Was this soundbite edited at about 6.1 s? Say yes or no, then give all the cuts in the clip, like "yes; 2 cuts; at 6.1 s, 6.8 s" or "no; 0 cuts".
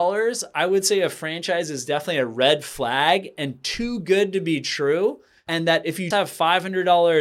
yes; 1 cut; at 6.1 s